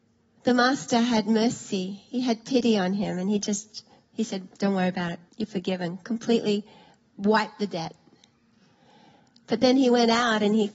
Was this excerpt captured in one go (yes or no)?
no